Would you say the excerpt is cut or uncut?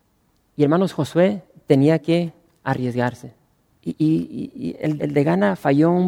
cut